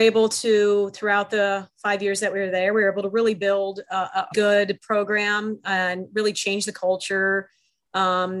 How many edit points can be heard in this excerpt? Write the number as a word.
one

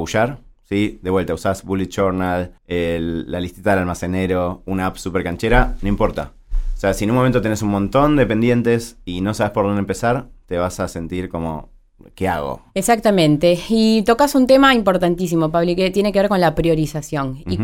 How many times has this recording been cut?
one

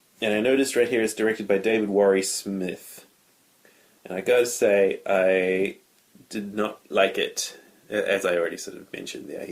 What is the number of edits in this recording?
zero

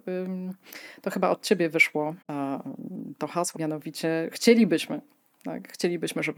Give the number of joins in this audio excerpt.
two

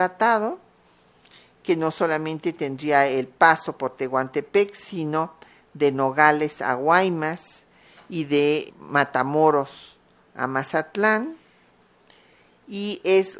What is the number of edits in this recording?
one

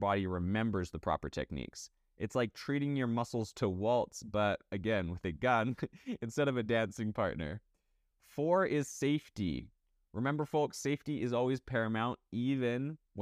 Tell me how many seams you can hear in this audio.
zero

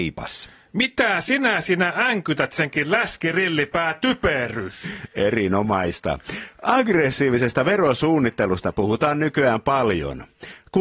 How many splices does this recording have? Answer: zero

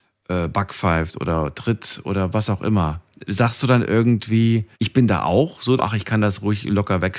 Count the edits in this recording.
two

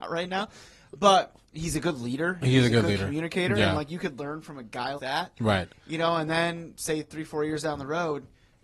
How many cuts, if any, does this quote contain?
one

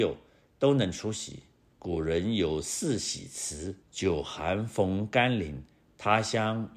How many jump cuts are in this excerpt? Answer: two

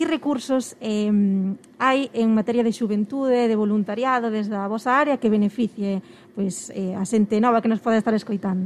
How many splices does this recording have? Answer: zero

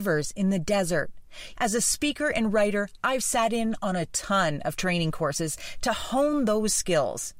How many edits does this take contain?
one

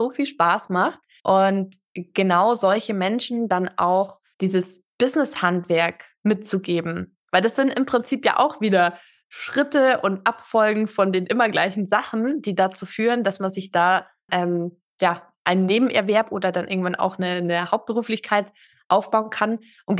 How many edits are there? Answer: one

